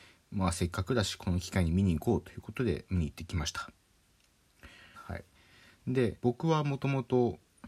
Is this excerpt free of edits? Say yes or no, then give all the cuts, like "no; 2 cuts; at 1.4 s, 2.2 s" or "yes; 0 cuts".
no; 2 cuts; at 4.9 s, 6.2 s